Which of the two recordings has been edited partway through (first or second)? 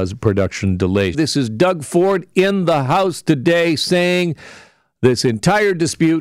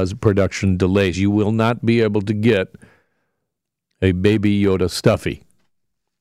first